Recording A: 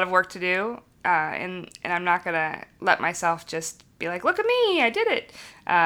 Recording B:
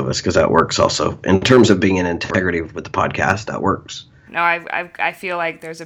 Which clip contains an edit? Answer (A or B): B